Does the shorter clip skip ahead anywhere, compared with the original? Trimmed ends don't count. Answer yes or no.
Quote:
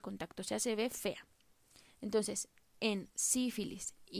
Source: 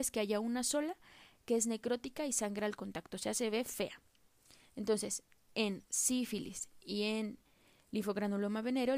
no